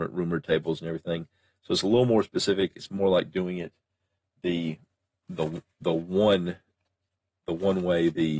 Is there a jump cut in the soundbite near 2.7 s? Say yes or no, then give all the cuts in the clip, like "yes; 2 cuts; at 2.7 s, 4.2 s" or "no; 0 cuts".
no; 0 cuts